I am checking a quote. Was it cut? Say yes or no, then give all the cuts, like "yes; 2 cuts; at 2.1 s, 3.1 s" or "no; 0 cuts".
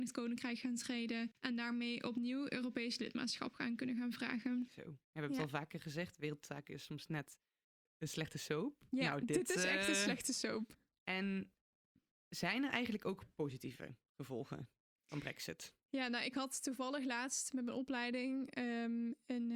no; 0 cuts